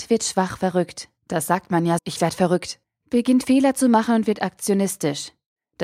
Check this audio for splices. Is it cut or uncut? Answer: cut